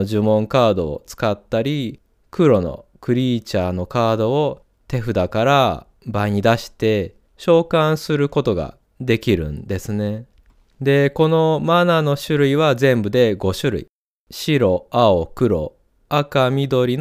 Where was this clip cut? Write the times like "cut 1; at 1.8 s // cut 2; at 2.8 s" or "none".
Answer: none